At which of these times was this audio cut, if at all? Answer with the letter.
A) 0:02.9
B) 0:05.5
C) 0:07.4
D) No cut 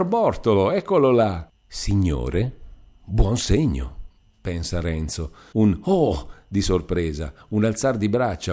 B